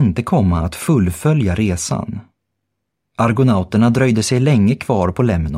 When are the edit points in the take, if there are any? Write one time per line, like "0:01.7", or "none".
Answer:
0:03.0

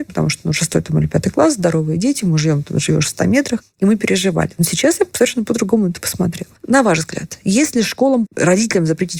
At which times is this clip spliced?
0:06.6
0:08.3

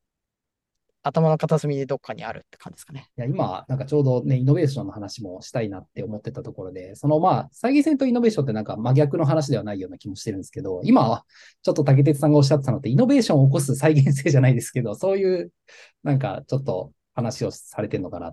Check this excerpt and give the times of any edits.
0:03.1

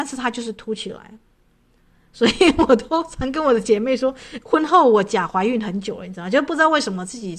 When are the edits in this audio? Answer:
0:04.4

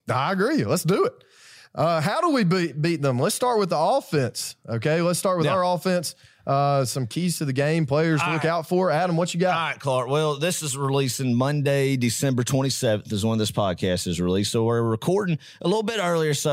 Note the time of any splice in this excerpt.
none

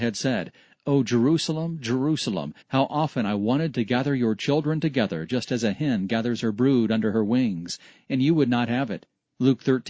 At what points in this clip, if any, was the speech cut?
0:02.6

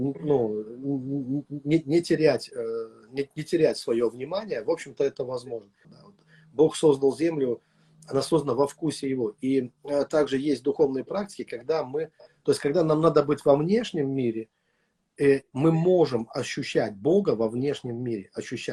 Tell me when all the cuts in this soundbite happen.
0:05.8

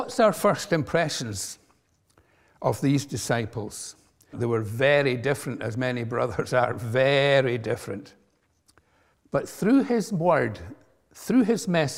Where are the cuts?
0:04.3
0:09.1

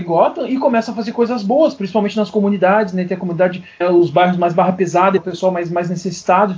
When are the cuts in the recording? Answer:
0:03.8
0:05.2

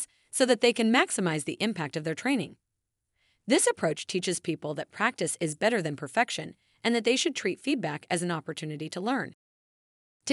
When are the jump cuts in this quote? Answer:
none

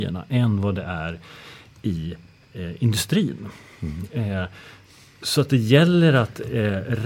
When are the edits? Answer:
none

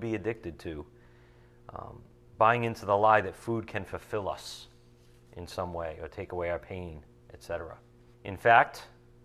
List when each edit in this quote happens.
0:08.1

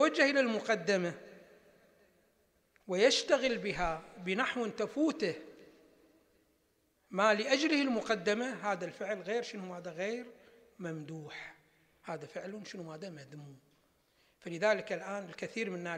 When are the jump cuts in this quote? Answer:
none

